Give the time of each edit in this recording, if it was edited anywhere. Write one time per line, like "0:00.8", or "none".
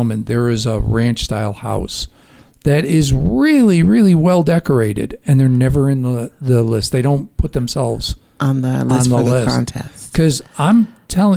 none